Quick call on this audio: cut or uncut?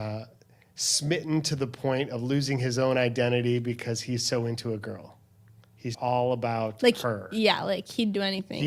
cut